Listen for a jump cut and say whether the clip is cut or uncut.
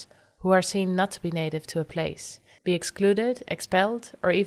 cut